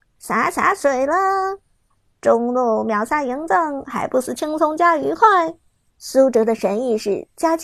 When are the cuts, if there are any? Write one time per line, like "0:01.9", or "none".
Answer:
0:05.9